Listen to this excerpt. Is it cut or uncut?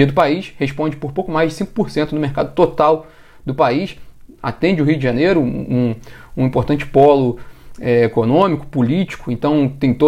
uncut